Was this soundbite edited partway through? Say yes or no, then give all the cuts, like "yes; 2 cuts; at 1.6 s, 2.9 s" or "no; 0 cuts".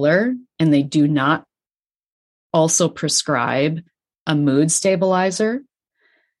no; 0 cuts